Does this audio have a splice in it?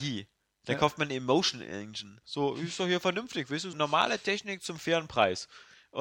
yes; 2 cuts; at 2.2 s, 3.7 s

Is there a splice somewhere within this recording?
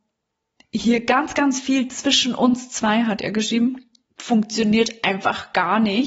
no; 0 cuts

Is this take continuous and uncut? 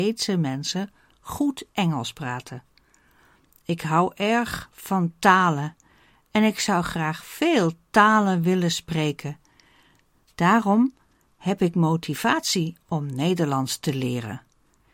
yes; 0 cuts

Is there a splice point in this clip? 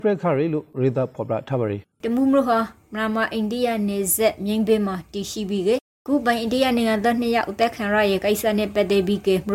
yes; 1 cut; at 1.9 s

